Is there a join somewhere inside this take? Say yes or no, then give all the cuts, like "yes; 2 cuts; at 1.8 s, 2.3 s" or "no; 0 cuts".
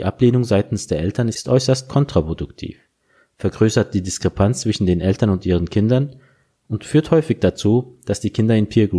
no; 0 cuts